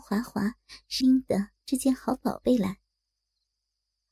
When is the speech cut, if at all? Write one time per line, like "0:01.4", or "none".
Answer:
0:01.0